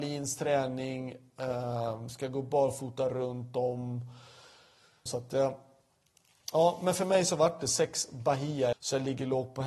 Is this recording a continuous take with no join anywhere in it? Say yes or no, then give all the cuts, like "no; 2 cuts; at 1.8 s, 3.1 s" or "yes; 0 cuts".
no; 2 cuts; at 5.1 s, 8.7 s